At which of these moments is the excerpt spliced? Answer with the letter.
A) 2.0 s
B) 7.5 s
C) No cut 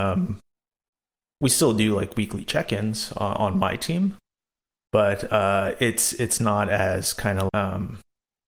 B